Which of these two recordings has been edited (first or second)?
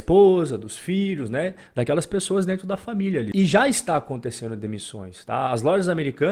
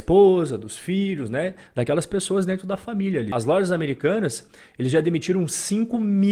second